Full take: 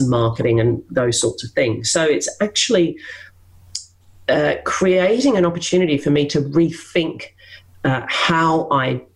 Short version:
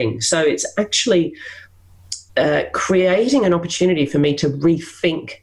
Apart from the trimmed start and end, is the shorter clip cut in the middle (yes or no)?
yes